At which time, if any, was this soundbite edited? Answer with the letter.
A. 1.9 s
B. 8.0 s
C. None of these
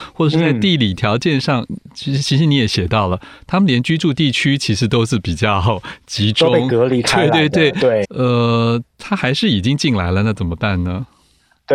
B